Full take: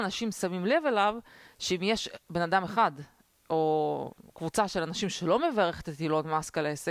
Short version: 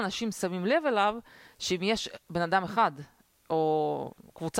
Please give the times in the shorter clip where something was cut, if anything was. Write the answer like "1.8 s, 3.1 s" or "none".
none